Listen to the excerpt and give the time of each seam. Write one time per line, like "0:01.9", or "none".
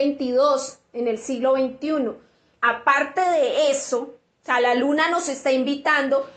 0:02.6